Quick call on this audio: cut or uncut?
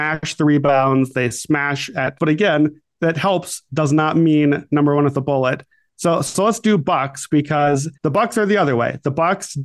cut